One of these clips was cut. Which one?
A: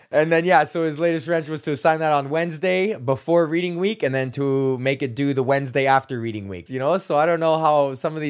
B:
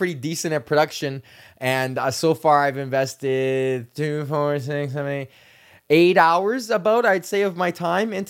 A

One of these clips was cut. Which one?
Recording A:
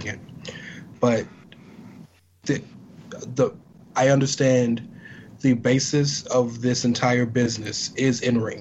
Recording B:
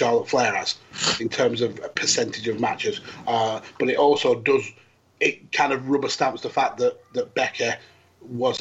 B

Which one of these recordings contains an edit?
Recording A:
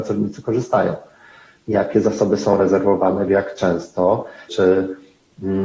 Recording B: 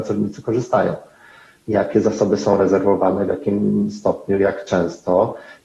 A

